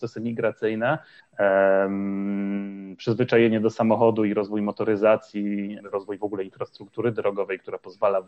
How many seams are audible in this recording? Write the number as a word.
two